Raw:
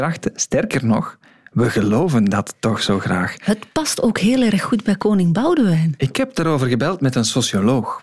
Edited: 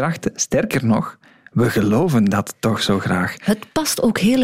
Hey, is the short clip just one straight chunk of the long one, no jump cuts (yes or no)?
yes